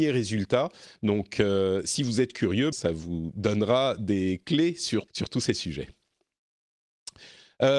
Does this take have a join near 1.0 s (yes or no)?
no